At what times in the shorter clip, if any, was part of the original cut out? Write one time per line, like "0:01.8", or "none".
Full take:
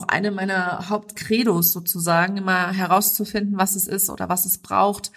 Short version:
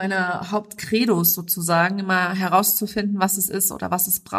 none